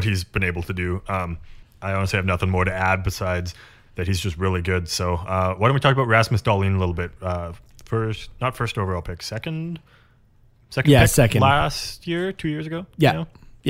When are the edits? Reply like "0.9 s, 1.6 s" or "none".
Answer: none